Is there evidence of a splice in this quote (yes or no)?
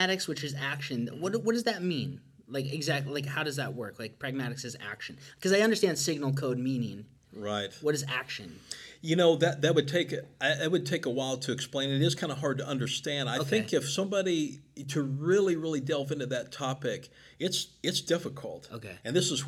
no